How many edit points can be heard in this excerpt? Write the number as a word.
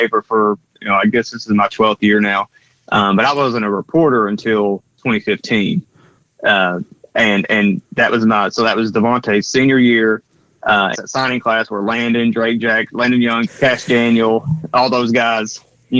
two